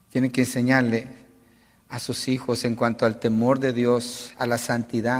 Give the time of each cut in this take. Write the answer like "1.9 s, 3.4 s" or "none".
none